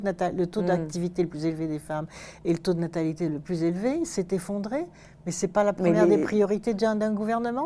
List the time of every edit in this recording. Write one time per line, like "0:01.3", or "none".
none